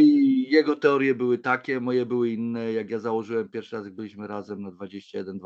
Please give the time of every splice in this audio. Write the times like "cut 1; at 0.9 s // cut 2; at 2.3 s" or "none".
none